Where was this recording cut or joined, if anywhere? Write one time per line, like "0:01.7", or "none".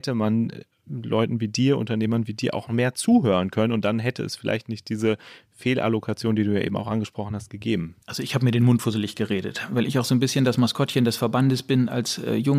0:08.0